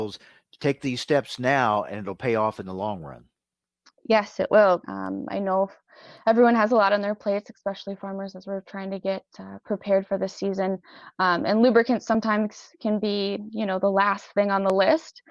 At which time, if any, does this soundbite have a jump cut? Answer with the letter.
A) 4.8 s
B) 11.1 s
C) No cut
A